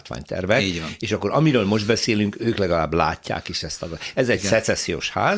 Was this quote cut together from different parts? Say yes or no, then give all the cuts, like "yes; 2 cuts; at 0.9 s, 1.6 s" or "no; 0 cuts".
no; 0 cuts